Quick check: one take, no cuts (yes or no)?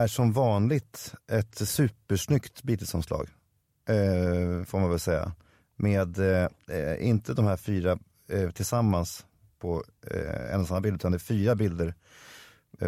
yes